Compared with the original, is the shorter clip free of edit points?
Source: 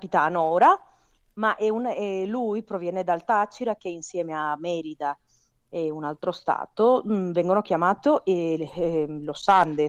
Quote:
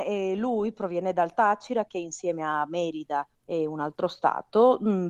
no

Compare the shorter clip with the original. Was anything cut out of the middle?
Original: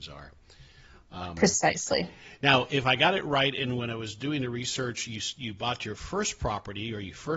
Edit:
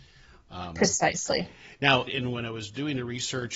yes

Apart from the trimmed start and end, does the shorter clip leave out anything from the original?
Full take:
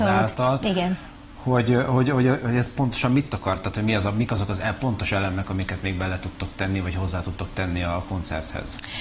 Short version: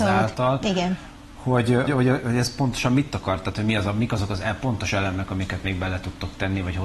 yes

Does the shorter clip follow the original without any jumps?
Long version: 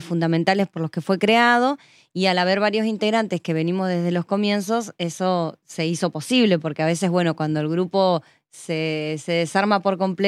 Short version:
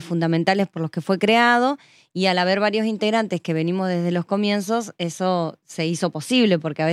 yes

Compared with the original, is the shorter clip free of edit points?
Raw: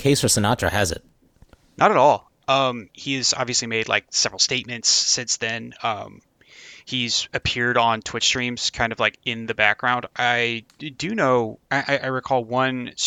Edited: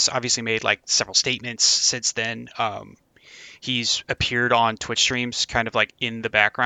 yes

